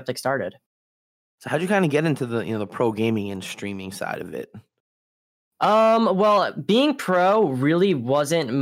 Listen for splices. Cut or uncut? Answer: uncut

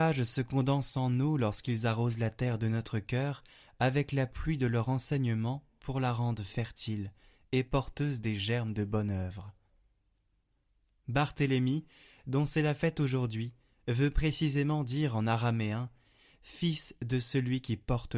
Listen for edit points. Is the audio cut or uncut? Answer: uncut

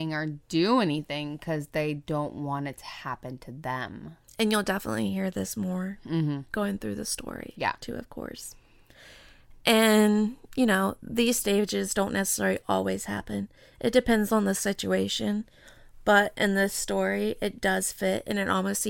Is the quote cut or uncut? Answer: uncut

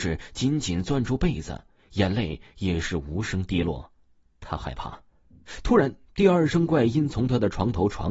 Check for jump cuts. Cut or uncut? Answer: uncut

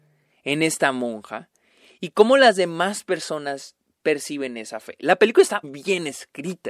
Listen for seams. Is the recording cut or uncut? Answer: cut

